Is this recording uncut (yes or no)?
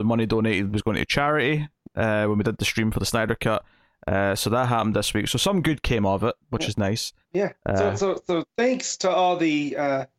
yes